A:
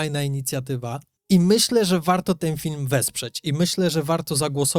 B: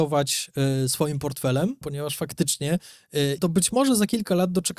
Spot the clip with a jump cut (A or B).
B